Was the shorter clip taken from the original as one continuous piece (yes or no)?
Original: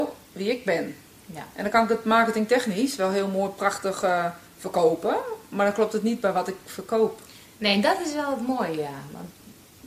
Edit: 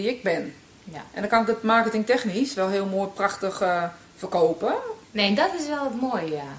no